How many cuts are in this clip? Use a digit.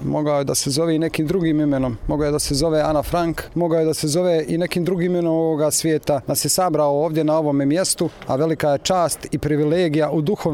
1